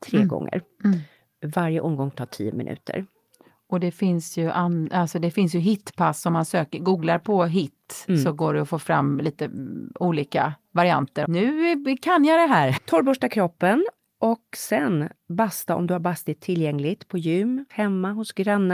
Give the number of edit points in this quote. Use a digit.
3